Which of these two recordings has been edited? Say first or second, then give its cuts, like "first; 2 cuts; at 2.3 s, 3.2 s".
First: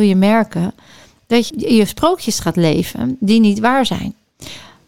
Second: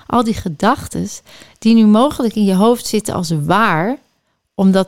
first; 1 cut; at 1.5 s